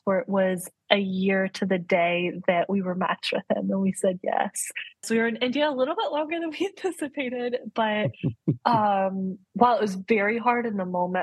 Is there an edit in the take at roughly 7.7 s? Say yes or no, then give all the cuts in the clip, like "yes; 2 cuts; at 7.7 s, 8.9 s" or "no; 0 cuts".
no; 2 cuts; at 5.0 s, 9.4 s